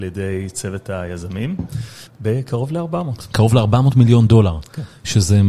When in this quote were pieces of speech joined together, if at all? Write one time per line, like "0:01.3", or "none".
0:02.1